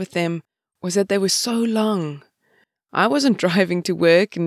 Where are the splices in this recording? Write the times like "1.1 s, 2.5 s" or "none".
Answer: none